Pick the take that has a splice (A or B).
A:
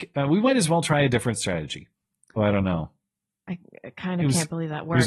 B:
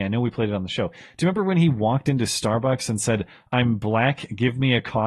A